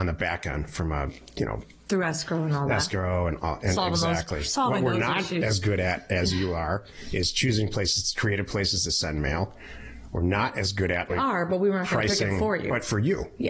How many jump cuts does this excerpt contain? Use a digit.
1